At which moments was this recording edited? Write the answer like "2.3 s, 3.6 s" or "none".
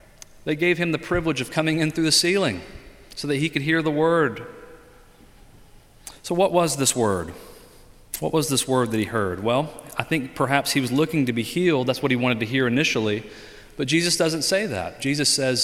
none